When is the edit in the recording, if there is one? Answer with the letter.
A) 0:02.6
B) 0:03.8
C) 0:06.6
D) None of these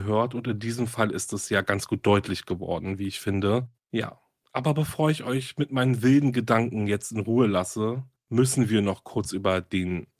B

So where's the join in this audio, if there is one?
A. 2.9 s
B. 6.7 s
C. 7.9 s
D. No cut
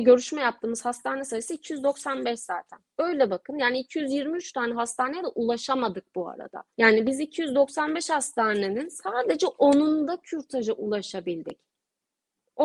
B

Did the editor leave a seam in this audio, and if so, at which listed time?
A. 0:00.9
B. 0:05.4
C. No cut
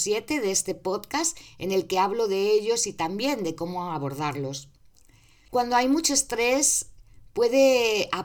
B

